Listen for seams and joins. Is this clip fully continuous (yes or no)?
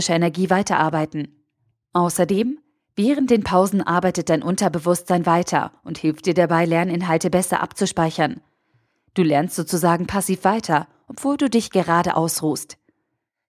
yes